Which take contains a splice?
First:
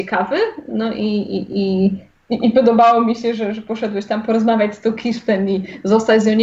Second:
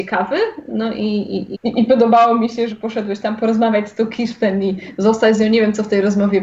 second; 2 cuts; at 1.5 s, 2.7 s

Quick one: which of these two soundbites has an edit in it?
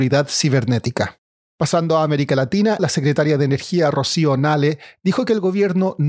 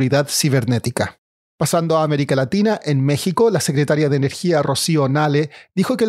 first; 1 cut; at 2.8 s

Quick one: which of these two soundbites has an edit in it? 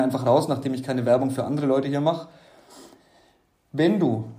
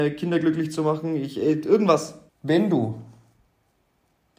second; 1 cut; at 2.3 s

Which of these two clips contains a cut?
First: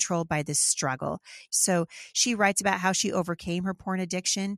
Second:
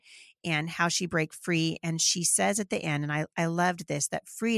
first; 1 cut; at 1.5 s

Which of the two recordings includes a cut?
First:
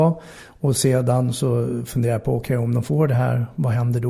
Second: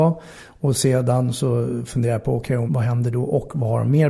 second; 1 cut; at 2.7 s

